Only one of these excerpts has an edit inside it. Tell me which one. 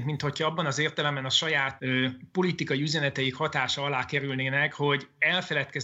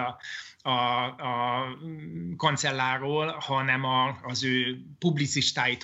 first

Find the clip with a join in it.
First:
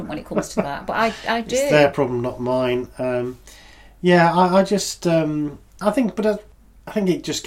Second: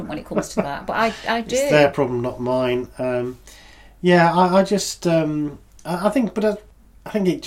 first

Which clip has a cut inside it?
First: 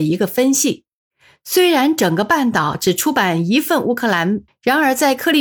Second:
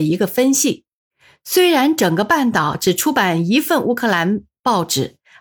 first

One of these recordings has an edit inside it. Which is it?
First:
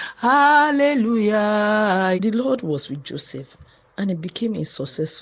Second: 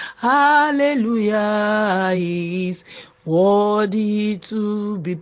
first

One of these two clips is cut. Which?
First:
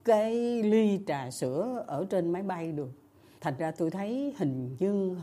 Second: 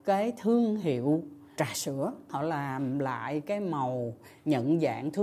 second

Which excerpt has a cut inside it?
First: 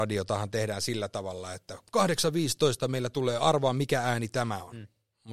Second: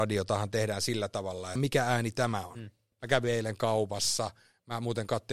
second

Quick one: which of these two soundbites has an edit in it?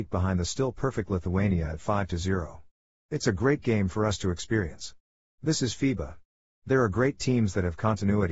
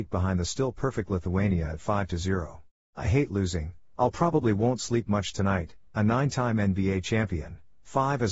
second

